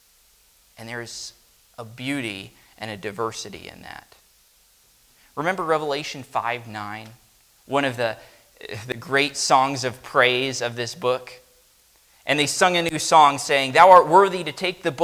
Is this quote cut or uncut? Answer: uncut